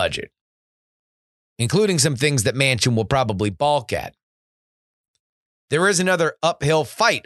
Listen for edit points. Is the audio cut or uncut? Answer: uncut